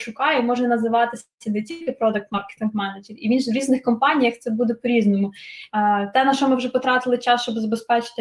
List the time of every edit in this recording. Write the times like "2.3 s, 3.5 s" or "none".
5.7 s